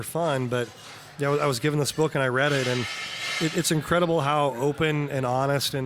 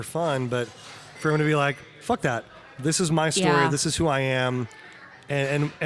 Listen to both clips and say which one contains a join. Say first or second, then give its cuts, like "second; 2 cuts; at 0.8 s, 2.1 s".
second; 1 cut; at 1.2 s